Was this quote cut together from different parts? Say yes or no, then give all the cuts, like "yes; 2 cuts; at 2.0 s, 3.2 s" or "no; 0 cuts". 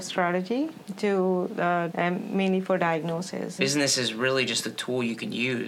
yes; 2 cuts; at 1.9 s, 3.6 s